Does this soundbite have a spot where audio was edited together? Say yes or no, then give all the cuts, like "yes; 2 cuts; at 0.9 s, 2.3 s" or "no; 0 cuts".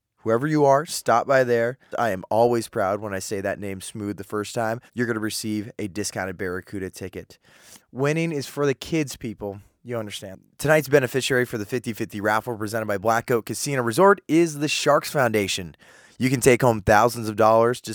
yes; 3 cuts; at 1.9 s, 4.9 s, 7.8 s